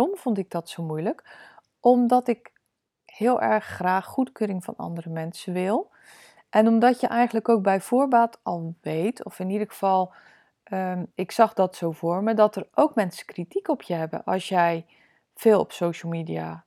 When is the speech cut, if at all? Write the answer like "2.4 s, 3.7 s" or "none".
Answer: none